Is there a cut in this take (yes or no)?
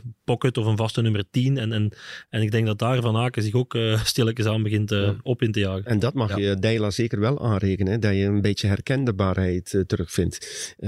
no